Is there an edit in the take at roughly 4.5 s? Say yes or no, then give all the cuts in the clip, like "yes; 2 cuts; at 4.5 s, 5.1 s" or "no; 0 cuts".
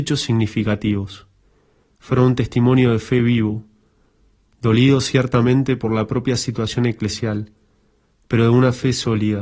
no; 1 cut; at 1.9 s